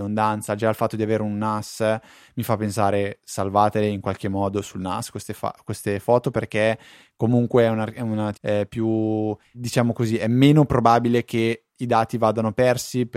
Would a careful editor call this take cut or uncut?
cut